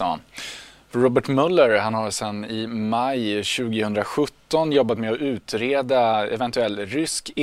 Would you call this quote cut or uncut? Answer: uncut